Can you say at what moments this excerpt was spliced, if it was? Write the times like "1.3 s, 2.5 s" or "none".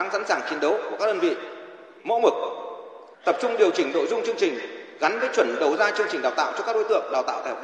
2.0 s, 3.1 s